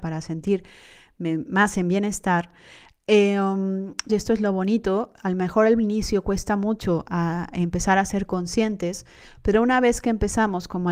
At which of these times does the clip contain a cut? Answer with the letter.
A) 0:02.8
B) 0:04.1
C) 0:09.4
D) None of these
B